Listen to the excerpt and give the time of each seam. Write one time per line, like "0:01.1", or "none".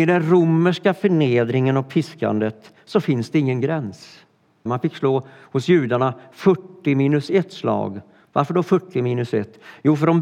0:04.7
0:08.2